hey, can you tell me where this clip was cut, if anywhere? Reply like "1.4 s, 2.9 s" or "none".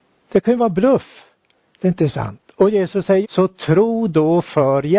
3.2 s